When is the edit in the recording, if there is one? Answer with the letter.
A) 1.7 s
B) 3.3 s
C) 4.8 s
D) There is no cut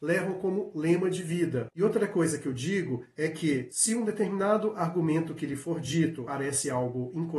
A